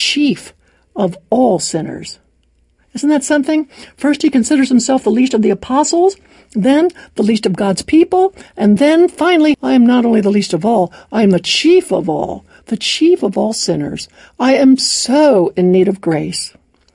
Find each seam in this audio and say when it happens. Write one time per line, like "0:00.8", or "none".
0:09.5